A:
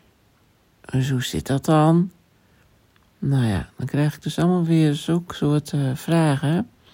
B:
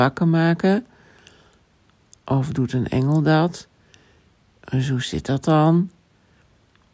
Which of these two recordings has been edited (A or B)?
B